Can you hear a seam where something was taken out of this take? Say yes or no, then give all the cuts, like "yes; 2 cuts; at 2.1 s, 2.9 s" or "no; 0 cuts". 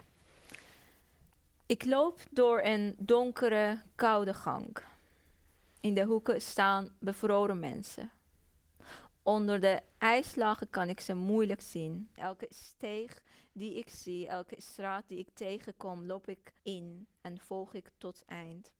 yes; 2 cuts; at 12.2 s, 16.6 s